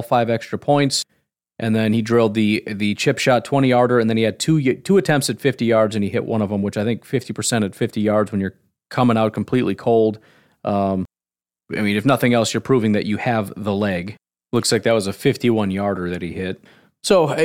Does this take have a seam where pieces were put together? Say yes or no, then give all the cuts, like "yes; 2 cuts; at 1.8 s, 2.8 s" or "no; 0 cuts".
no; 0 cuts